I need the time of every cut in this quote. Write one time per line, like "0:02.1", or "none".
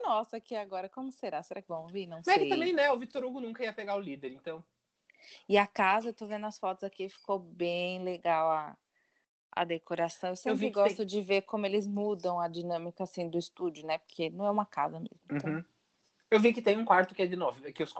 none